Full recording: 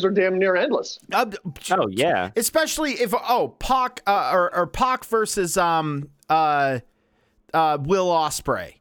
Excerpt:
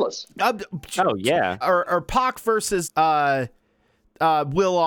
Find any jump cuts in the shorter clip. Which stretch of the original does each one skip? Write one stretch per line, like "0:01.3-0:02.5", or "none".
0:02.3-0:04.3
0:05.5-0:06.2

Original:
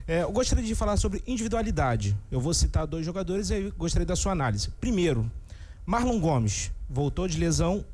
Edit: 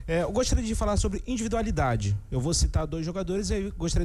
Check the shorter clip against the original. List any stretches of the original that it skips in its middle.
none

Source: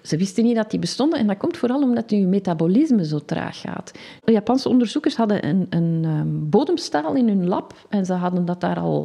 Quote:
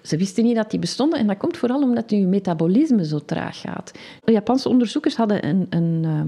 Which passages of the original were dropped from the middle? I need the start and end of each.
none

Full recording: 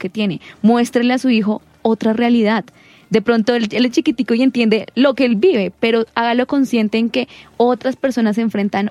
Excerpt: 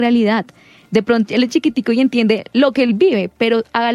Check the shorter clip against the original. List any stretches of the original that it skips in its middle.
0:03.5-0:03.7

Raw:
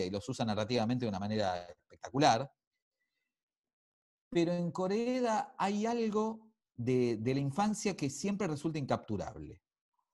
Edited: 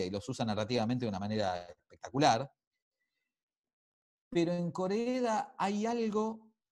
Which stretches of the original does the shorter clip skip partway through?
none

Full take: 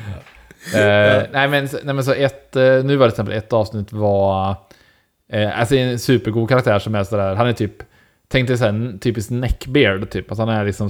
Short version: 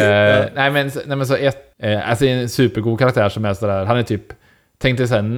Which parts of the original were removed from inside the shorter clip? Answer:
0:02.5-0:05.2

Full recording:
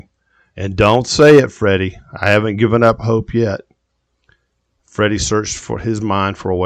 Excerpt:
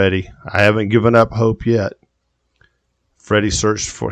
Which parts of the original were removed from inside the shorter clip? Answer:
none

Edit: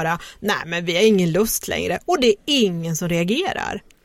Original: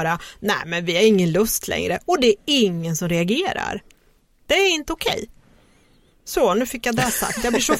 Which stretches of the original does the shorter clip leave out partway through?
none

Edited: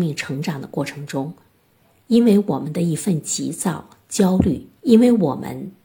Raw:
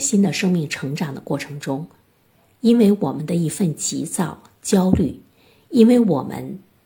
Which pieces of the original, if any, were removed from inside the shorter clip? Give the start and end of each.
0:05.3-0:05.6

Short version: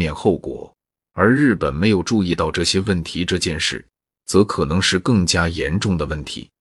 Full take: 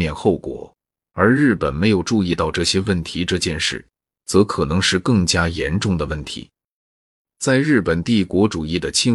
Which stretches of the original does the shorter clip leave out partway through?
none

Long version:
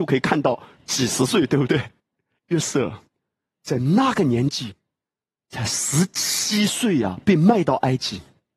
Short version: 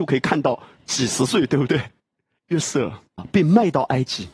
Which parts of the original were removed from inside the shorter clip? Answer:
0:03.2-0:07.1

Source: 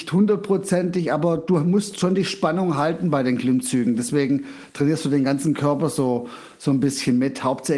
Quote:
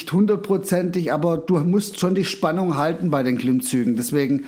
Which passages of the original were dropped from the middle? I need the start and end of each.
none

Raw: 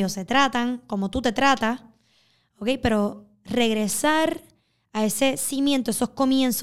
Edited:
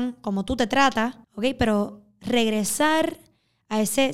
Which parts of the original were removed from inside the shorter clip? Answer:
0:01.9-0:02.5

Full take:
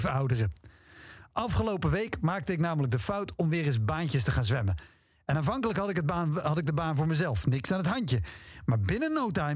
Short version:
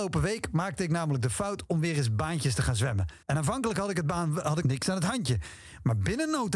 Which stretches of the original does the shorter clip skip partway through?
0:04.9-0:05.2
0:06.6-0:07.4

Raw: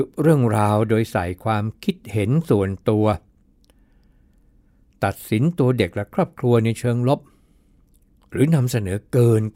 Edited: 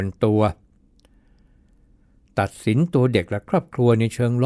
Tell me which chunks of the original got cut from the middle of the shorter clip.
none

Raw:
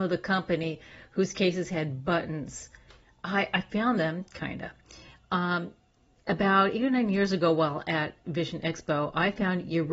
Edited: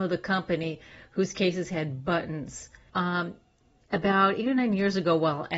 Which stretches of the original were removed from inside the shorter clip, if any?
0:02.9-0:05.3

